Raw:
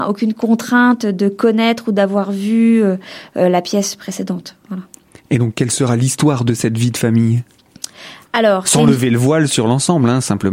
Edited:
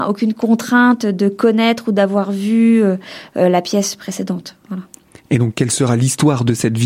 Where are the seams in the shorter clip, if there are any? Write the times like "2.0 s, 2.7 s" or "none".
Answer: none